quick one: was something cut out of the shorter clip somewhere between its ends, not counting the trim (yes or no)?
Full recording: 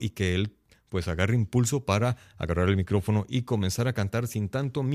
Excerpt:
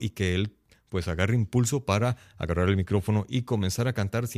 no